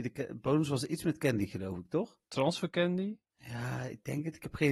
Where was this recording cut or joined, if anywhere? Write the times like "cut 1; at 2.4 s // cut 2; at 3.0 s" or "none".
cut 1; at 2.2 s

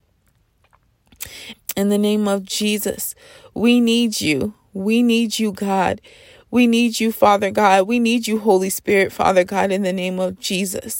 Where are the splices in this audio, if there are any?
cut 1; at 1.5 s

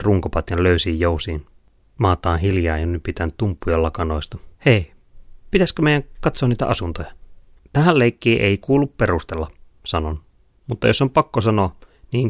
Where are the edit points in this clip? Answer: cut 1; at 4.6 s // cut 2; at 7.6 s

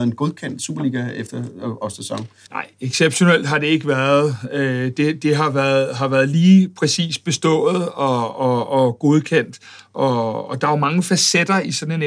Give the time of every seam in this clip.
cut 1; at 2.5 s

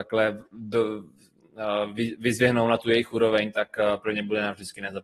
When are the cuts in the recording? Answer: none

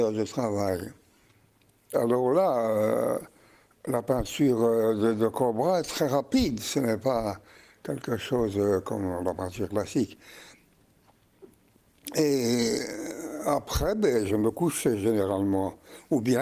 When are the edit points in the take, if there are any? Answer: cut 1; at 1.9 s // cut 2; at 14.3 s

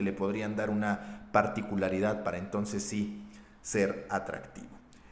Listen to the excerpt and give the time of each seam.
none

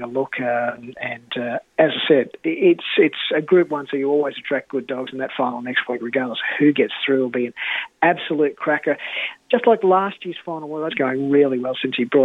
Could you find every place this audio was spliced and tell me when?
cut 1; at 10.9 s

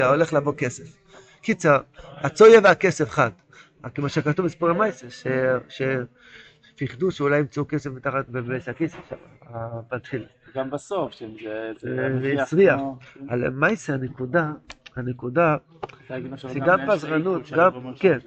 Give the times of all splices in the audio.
none

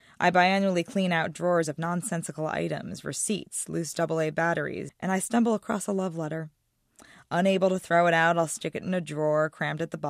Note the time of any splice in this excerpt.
cut 1; at 4.9 s

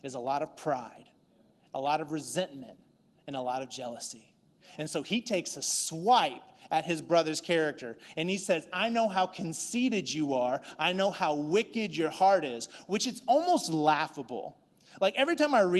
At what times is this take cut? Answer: none

